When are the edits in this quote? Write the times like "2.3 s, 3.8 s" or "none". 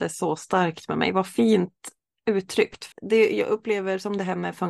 2.9 s

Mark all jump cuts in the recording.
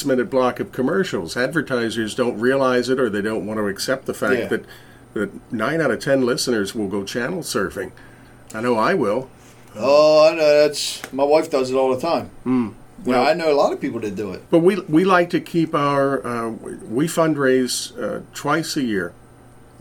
14.5 s

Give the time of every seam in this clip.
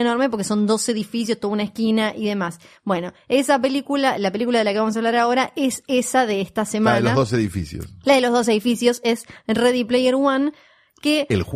none

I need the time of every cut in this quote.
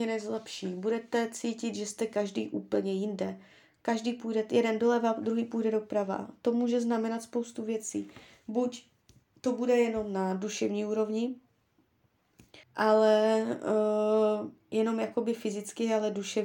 12.6 s

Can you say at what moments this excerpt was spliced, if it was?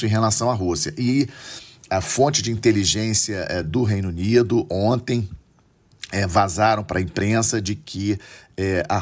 none

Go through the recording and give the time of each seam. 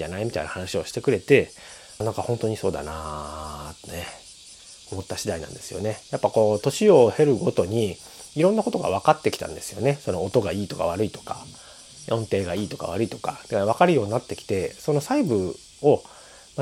2.0 s

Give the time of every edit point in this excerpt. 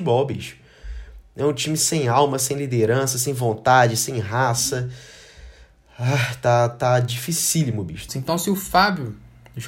8.1 s

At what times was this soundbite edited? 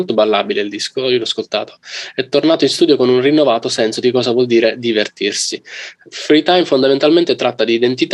none

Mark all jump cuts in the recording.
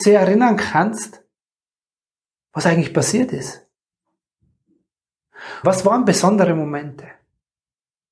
5.6 s

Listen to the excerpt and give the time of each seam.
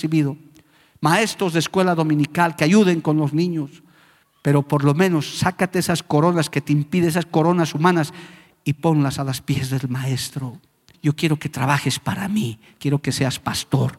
4.2 s, 10.9 s

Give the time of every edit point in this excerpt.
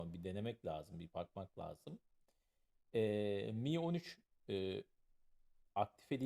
none

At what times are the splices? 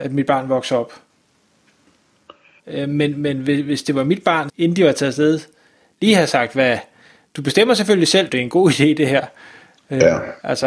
2.6 s, 4.5 s, 8.3 s

